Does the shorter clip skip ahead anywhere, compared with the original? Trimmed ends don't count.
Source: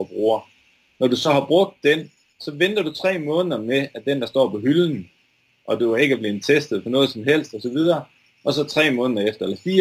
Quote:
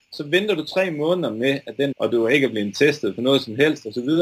yes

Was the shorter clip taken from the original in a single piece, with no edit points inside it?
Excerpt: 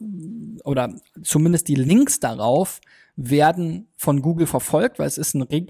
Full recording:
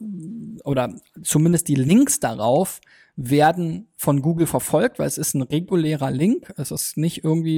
yes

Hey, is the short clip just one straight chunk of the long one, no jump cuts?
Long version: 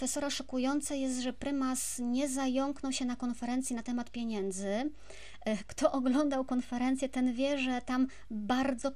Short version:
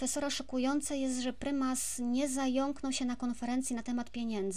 yes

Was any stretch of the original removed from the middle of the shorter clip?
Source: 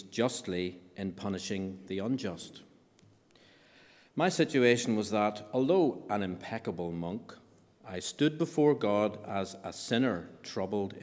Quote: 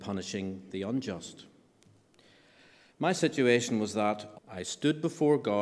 yes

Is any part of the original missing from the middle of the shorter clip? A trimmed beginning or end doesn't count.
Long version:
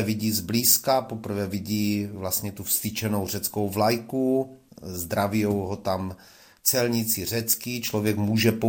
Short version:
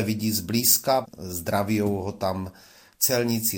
yes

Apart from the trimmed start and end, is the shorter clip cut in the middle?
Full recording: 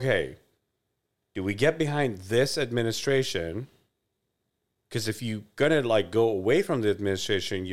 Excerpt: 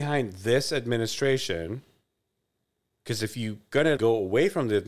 yes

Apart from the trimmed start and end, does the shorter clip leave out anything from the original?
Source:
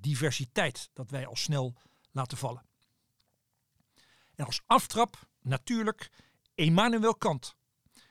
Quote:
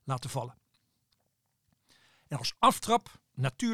no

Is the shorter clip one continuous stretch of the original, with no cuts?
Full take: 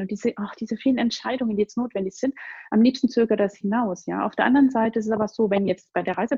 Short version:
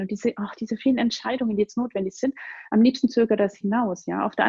yes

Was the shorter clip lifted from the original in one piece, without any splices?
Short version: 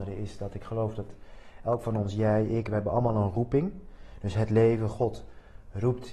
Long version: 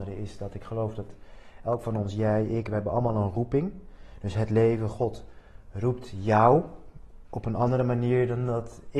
yes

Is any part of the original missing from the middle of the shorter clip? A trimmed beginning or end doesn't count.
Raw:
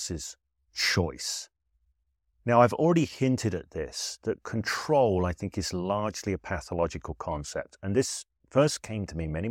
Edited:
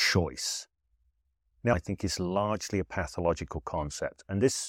yes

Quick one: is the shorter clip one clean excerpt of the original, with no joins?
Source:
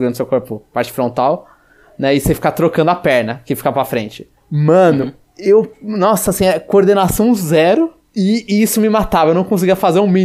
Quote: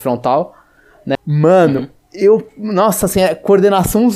no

